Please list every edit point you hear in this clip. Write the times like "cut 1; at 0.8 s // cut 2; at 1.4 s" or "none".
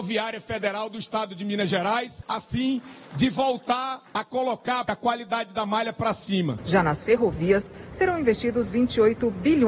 cut 1; at 6.6 s